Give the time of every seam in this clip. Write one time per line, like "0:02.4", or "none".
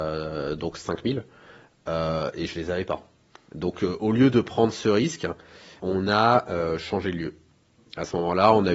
0:05.8